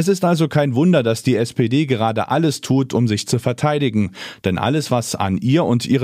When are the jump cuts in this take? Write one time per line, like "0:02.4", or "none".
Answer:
none